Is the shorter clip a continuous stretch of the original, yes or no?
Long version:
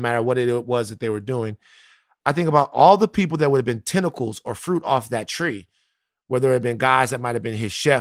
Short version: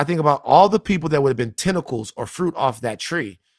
yes